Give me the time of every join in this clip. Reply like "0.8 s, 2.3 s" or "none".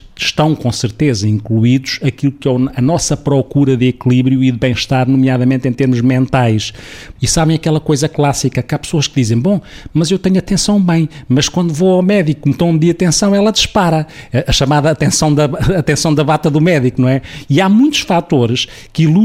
7.2 s